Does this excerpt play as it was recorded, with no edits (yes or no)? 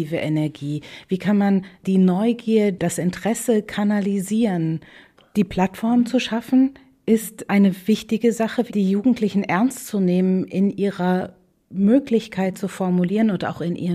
no